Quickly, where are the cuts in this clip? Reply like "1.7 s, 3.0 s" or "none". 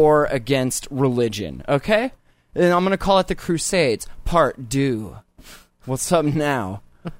none